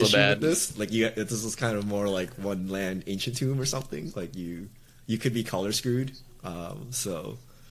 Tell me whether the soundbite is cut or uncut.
uncut